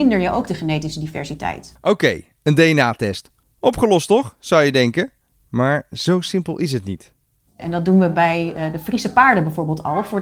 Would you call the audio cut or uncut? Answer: cut